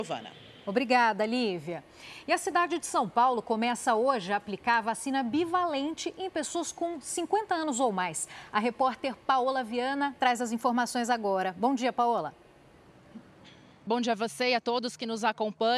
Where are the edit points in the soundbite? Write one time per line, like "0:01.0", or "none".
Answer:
0:13.9